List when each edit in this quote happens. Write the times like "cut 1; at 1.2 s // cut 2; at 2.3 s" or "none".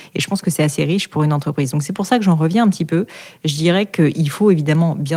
none